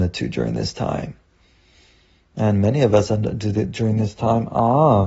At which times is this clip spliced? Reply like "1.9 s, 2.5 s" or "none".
none